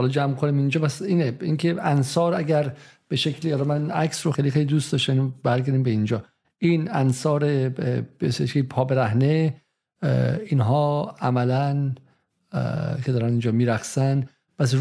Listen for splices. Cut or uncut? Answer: cut